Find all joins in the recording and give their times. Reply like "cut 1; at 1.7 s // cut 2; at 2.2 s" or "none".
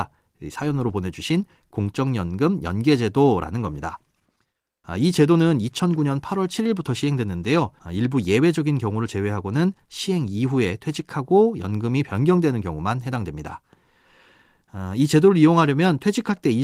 cut 1; at 7.8 s